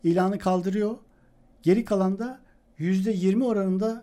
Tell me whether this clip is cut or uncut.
uncut